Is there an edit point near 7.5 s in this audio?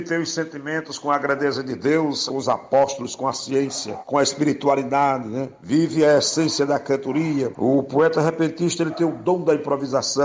no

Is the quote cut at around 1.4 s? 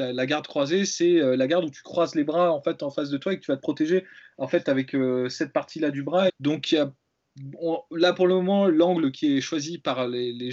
no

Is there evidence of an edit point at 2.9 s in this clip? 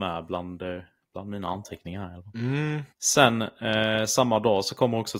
yes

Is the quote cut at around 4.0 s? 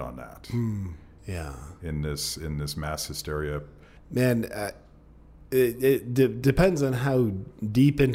yes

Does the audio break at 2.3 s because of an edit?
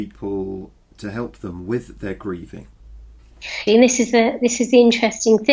no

